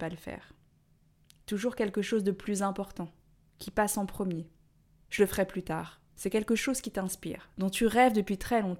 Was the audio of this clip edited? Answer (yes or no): yes